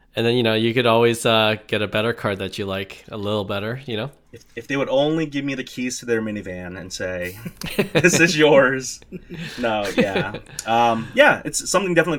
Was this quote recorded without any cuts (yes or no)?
yes